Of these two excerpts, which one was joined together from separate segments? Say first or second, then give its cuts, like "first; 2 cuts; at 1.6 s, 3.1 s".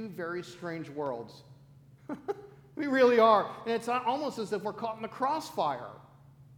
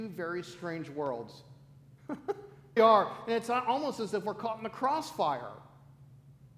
second; 1 cut; at 2.8 s